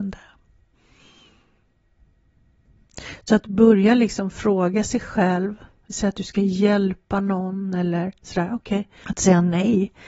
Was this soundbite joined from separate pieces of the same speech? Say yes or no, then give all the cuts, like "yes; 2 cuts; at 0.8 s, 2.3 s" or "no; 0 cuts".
yes; 1 cut; at 9.0 s